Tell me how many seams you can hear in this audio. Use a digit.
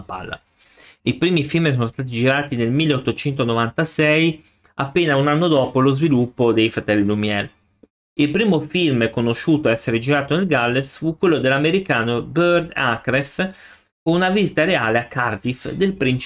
1